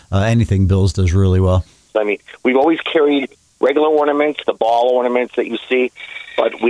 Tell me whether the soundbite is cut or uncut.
cut